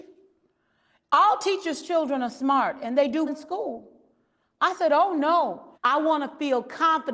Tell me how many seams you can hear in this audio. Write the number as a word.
two